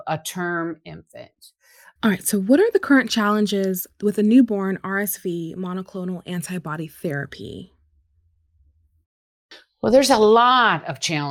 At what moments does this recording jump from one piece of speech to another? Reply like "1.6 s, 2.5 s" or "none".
2.0 s